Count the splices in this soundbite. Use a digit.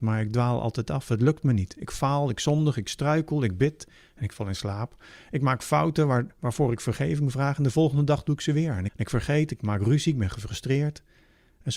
1